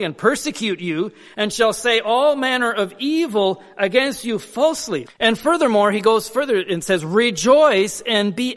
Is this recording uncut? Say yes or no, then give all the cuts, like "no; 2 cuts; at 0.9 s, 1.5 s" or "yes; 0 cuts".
no; 1 cut; at 5.1 s